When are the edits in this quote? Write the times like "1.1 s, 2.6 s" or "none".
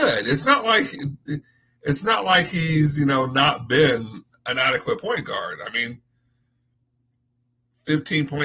none